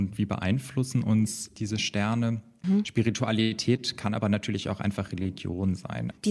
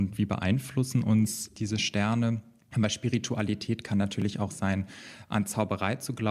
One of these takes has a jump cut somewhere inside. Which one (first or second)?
first